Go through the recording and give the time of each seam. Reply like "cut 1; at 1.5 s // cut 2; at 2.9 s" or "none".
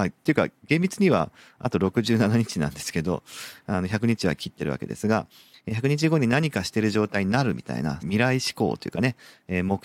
cut 1; at 8.0 s